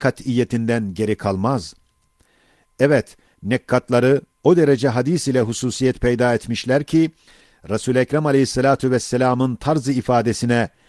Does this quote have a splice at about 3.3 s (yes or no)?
yes